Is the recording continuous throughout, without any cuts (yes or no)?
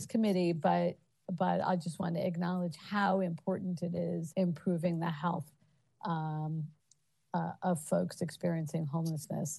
no